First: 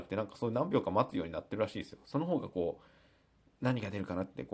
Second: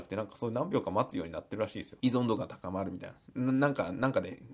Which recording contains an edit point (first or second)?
second